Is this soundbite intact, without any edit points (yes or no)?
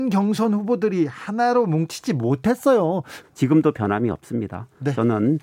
no